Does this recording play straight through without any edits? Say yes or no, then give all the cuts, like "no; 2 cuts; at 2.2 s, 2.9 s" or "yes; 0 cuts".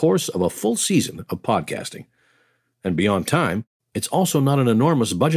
yes; 0 cuts